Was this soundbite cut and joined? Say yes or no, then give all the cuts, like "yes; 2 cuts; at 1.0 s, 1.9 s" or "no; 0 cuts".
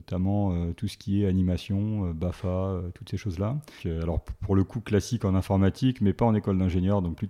yes; 1 cut; at 3.8 s